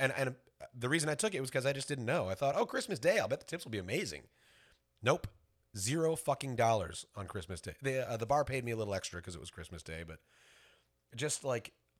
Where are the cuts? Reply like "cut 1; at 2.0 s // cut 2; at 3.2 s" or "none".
none